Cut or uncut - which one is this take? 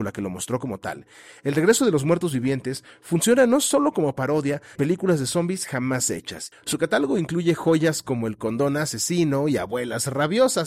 cut